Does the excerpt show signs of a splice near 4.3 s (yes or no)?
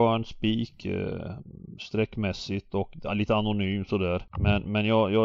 yes